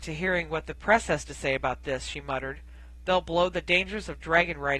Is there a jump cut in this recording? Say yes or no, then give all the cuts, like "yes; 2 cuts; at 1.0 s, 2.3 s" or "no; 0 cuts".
no; 0 cuts